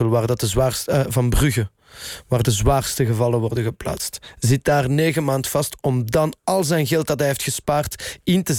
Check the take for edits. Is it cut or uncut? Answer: uncut